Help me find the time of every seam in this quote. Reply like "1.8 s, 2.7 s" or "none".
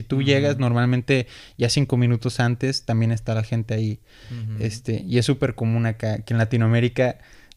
none